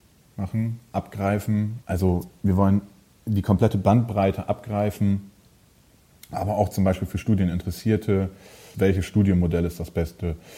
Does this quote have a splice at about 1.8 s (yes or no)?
yes